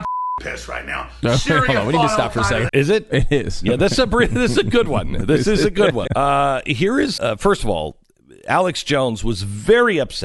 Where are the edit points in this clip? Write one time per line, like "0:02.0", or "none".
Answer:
0:02.7
0:06.1
0:07.2